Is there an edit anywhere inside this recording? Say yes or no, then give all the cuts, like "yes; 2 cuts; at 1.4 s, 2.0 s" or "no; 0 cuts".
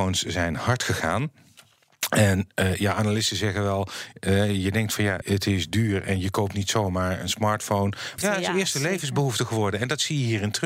yes; 2 cuts; at 5.2 s, 8.2 s